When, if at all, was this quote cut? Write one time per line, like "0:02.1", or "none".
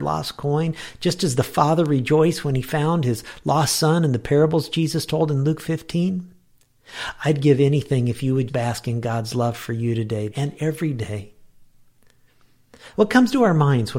0:08.5
0:10.3
0:12.9